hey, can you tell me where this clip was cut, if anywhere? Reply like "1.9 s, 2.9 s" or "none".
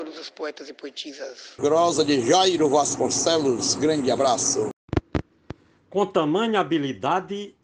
1.6 s